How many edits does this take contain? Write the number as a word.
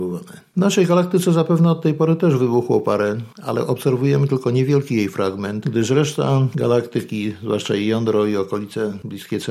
zero